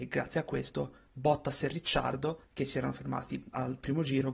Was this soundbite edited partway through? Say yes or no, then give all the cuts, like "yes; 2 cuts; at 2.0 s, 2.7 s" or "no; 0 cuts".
no; 0 cuts